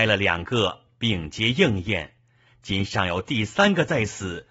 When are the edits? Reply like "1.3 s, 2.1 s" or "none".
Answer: none